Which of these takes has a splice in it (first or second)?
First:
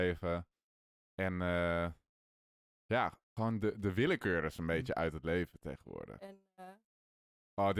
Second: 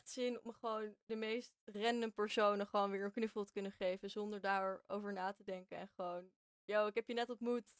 first